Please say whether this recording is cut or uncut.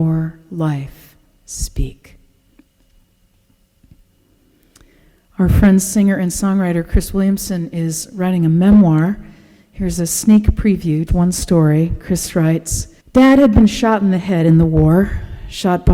cut